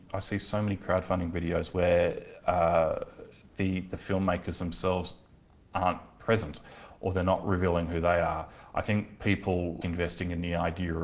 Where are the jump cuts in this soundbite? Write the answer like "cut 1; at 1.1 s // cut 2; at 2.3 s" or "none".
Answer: cut 1; at 9.8 s